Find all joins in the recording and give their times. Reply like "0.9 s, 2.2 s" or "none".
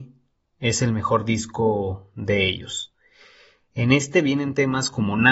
none